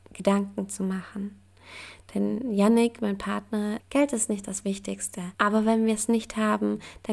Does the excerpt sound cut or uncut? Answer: cut